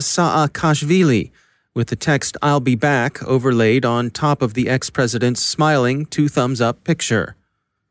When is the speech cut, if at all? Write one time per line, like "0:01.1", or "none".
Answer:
none

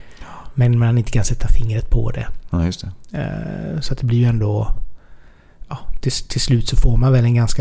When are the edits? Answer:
none

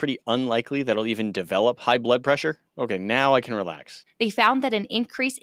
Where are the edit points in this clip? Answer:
0:02.6
0:04.1

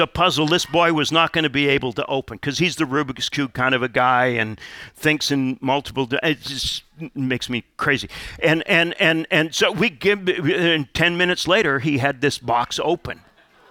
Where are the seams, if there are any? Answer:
none

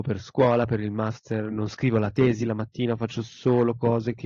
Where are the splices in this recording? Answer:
none

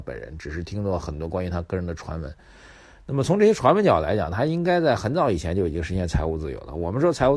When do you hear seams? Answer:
none

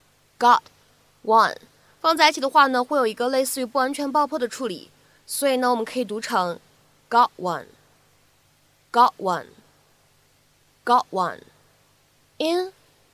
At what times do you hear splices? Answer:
none

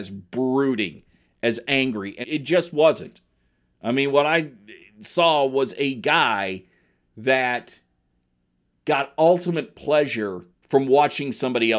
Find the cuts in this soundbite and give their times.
0:02.2
0:10.5

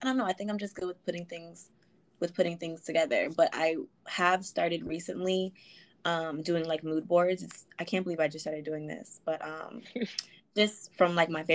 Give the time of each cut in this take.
none

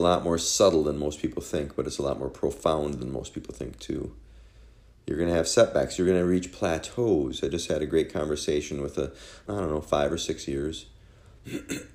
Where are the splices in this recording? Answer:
0:09.5

